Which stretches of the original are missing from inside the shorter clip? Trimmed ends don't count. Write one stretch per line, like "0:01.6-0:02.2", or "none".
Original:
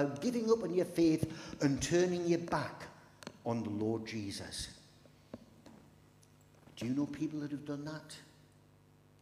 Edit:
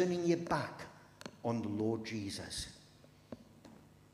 none